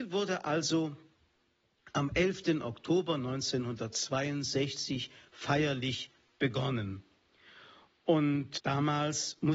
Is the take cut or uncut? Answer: cut